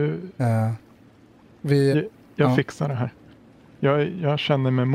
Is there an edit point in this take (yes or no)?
yes